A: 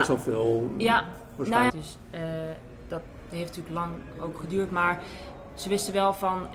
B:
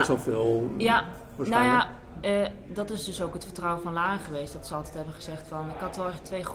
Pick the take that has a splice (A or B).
A